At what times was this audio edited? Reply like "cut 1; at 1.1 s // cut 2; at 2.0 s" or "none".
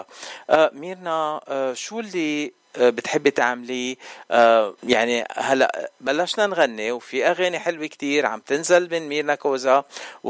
cut 1; at 4.8 s